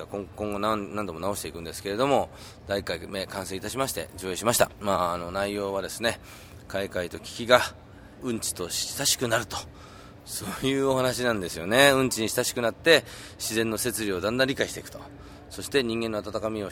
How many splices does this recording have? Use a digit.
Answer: 0